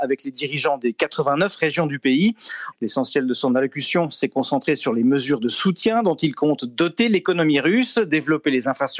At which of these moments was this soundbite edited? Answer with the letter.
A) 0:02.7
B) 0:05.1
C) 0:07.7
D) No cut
A